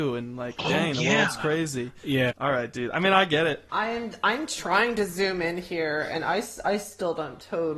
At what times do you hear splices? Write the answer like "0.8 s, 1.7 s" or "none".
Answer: 2.3 s, 3.7 s